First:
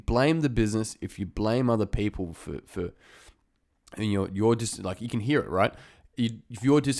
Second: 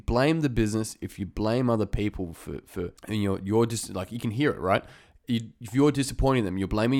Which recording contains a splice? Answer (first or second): second